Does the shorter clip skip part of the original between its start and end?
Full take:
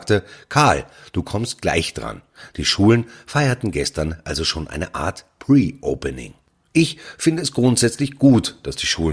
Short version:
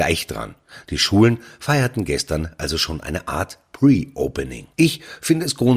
yes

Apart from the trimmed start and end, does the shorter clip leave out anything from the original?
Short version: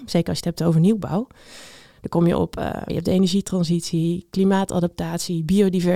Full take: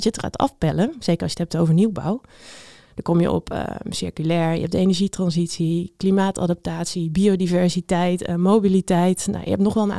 yes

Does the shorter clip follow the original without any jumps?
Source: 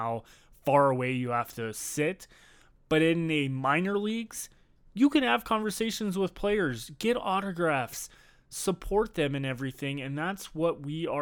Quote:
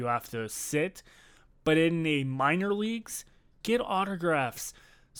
no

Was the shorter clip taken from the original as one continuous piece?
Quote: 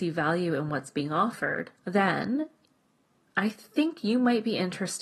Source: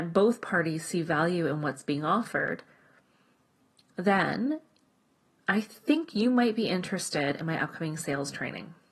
no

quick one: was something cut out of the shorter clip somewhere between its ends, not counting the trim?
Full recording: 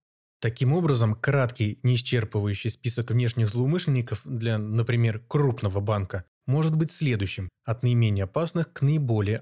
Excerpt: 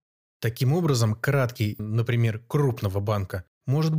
yes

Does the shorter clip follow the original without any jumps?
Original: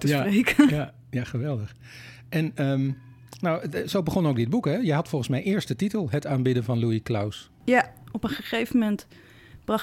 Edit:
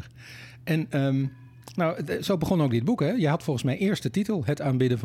yes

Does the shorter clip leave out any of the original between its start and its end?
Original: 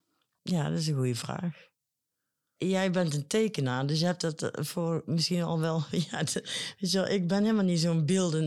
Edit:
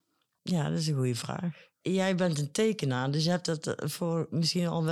yes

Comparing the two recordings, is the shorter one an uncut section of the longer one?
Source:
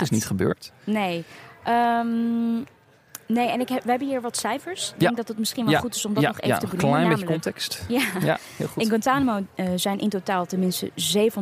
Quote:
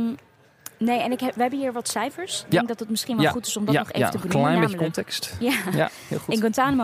yes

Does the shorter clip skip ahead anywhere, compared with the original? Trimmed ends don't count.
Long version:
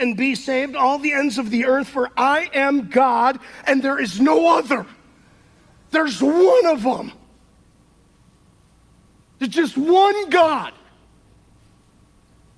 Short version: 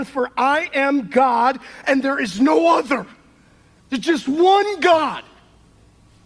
yes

